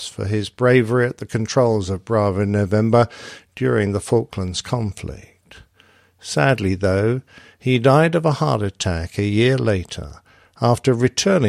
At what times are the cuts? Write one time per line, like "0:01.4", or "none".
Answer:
none